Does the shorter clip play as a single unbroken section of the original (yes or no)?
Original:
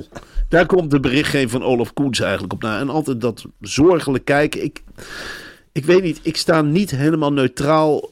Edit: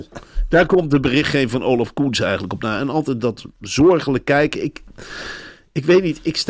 yes